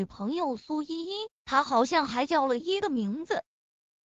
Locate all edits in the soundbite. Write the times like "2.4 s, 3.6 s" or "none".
2.6 s

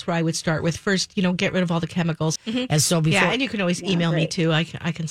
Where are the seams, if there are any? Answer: 2.4 s

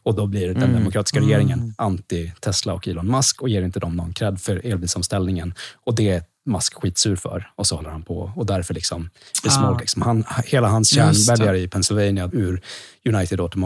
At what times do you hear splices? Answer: 9.8 s, 12.3 s

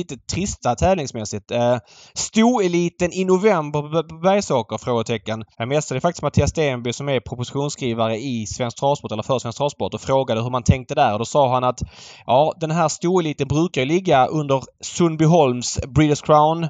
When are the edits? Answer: 5.5 s

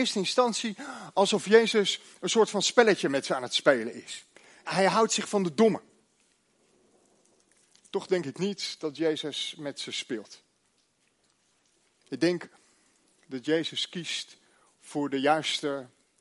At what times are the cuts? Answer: 4.7 s

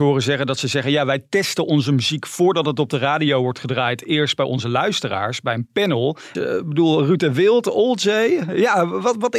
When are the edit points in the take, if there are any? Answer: 6.4 s

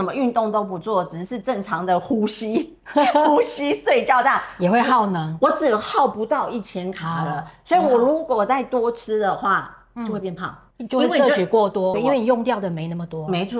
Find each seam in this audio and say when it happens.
10.7 s, 11.9 s

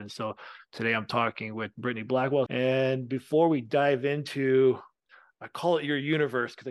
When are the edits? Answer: 2.5 s

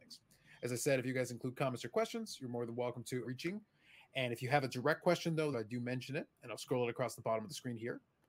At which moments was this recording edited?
3.2 s, 5.5 s

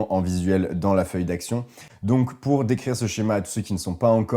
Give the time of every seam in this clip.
1.9 s

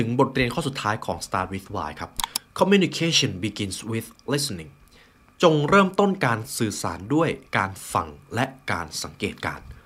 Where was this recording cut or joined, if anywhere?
7.5 s

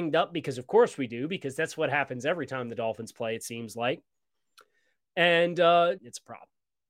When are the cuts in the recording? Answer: 6.0 s

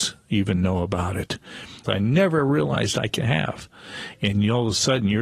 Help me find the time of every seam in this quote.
1.8 s

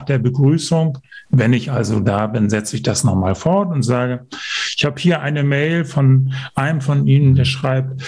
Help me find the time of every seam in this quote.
none

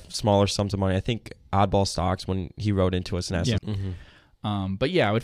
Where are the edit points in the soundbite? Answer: 3.6 s

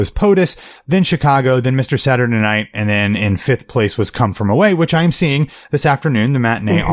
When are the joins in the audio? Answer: none

